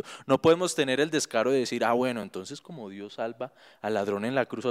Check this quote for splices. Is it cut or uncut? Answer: uncut